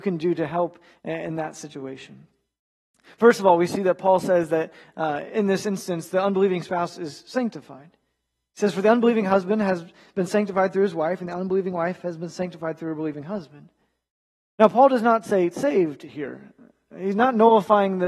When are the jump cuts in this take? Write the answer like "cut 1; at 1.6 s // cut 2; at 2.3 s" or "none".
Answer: none